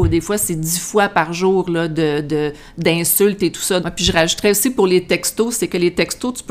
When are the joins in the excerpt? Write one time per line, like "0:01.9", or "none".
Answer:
0:03.8